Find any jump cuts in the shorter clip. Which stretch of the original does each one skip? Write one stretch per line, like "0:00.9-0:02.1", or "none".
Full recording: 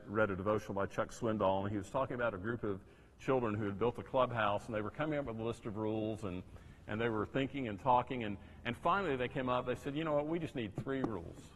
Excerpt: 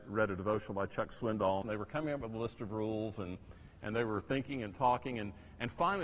0:01.6-0:04.7